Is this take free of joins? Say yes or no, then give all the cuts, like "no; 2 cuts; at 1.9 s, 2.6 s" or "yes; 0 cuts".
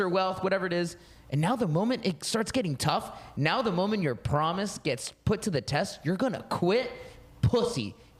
yes; 0 cuts